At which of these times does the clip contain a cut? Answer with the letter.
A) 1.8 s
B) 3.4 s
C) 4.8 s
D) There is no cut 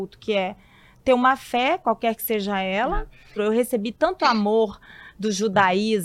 B